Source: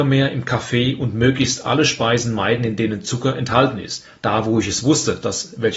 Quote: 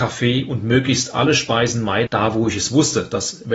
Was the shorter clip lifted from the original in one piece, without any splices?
no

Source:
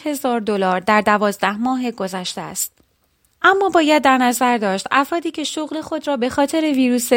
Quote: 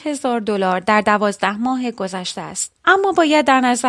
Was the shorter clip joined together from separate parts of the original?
yes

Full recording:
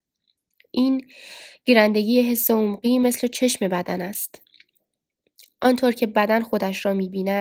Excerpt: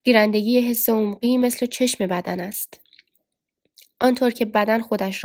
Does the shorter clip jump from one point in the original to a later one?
no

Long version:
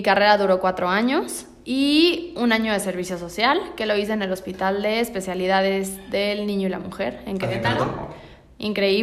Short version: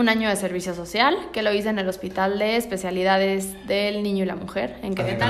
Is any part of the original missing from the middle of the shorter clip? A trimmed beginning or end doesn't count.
no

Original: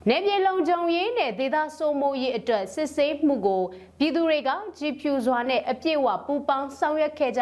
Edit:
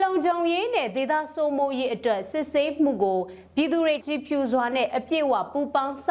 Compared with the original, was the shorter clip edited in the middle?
yes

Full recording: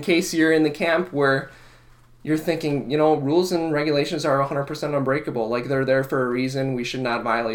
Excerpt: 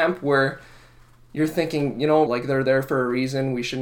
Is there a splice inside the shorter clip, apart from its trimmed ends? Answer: yes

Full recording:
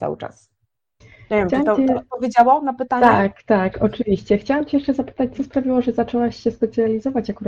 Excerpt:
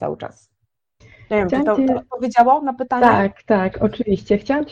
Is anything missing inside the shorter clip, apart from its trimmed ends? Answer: no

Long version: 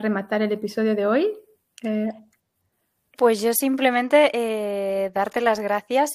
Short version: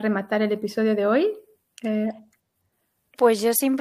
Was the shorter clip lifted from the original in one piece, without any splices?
yes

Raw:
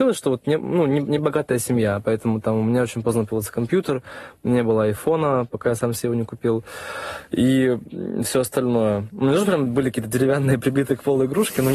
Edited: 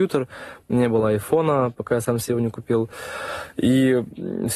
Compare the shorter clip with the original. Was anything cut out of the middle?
no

